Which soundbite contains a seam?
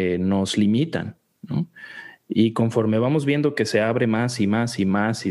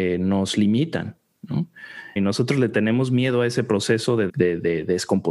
second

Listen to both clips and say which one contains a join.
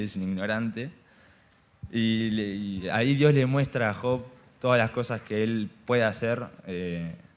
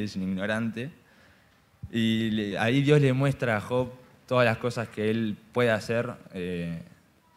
second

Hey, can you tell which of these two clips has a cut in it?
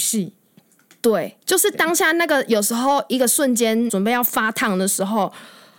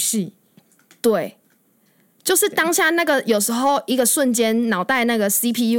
first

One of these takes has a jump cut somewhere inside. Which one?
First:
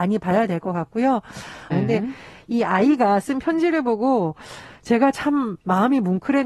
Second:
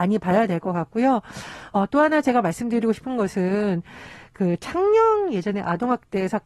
first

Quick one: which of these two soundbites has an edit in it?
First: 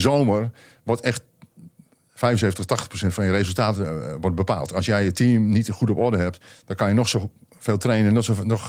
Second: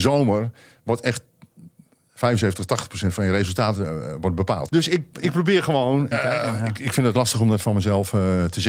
second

